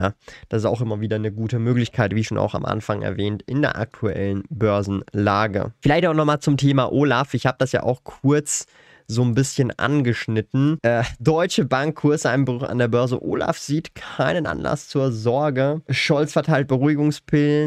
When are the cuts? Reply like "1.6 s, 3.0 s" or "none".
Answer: none